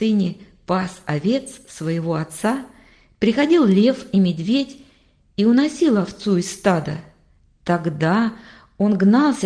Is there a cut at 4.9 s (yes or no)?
no